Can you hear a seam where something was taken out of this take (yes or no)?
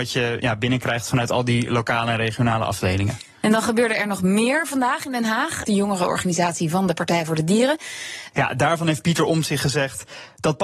yes